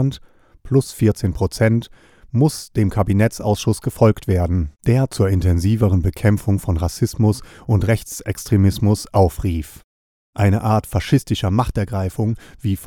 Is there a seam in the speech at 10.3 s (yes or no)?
yes